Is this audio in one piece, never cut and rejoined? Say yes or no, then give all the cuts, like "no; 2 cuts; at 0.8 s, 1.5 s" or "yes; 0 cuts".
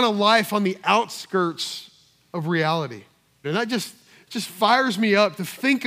no; 1 cut; at 3.4 s